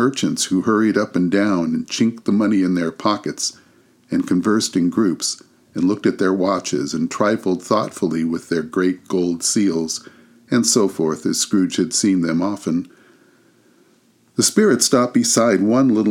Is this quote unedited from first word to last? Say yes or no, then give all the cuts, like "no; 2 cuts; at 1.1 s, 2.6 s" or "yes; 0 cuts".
yes; 0 cuts